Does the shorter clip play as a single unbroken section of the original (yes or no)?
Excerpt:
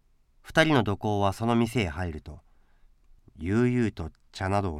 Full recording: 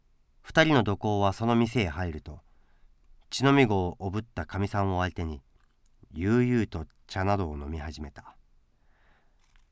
no